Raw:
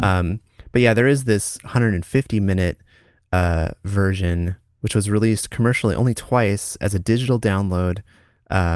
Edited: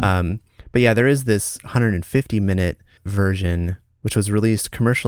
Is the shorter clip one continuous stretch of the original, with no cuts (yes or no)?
no